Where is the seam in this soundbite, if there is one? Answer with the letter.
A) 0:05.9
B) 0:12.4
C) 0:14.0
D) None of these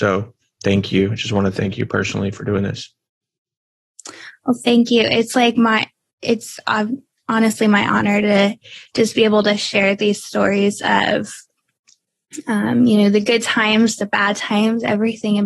D